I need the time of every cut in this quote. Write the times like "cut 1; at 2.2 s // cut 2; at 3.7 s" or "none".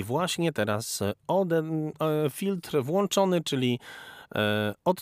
none